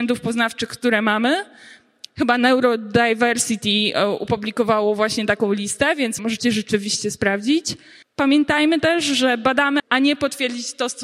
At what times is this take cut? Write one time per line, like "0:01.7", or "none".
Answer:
0:06.2
0:08.0
0:09.8

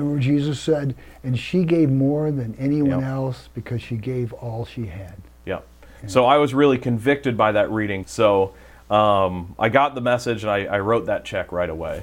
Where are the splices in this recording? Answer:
0:08.0

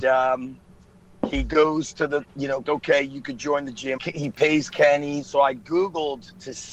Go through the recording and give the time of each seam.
0:02.6
0:04.0
0:05.2

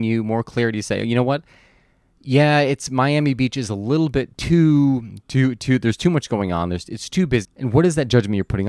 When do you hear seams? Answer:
0:07.4

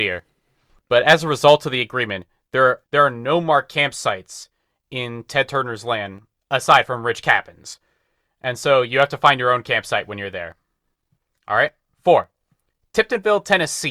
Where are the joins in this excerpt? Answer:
0:02.8

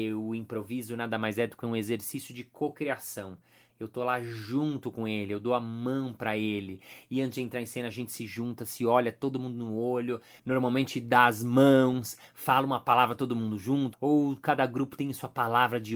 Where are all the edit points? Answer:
0:03.7
0:13.9

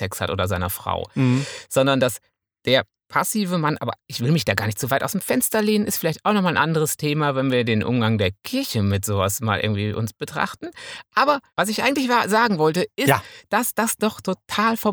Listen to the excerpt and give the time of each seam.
0:11.5

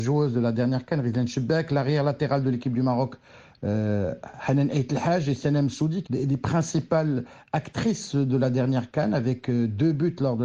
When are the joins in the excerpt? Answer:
0:06.0

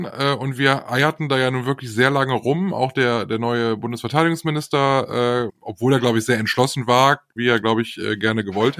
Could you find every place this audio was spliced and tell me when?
0:05.5
0:07.4

